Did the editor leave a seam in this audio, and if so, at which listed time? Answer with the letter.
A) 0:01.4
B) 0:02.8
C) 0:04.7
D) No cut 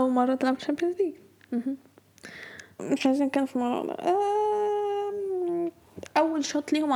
B